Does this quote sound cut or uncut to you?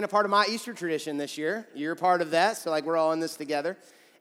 uncut